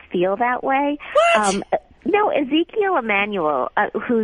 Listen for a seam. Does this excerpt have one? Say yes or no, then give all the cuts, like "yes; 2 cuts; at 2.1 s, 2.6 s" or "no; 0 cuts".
no; 0 cuts